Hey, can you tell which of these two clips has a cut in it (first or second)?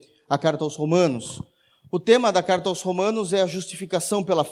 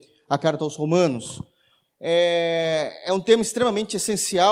second